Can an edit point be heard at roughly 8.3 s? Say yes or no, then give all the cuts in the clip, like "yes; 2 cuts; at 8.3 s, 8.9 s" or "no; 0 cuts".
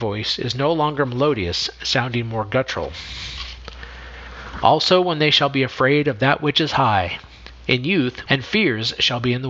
yes; 1 cut; at 8.3 s